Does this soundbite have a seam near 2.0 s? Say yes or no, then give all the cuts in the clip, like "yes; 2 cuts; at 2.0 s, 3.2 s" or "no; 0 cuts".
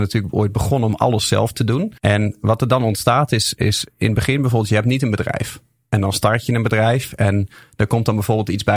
yes; 1 cut; at 2.0 s